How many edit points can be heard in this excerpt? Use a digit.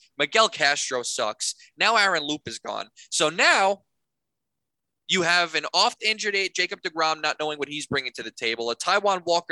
0